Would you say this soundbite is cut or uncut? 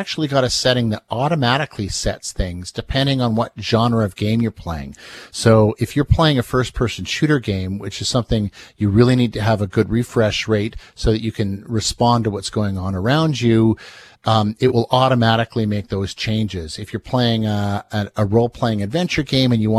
uncut